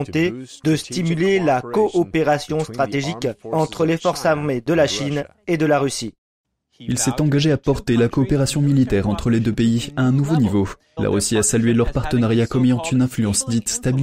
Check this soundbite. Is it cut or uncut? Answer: cut